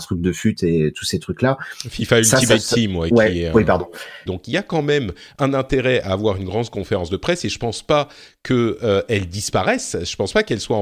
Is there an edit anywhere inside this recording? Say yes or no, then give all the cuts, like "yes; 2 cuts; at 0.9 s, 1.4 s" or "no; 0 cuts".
yes; 1 cut; at 4.3 s